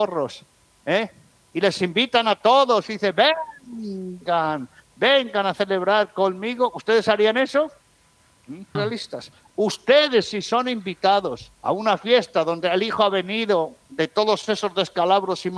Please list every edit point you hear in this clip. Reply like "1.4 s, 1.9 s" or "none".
8.7 s, 11.5 s, 13.8 s